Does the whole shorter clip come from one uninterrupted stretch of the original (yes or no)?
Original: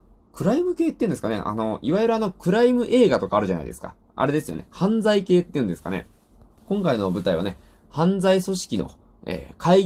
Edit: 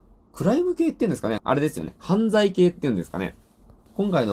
no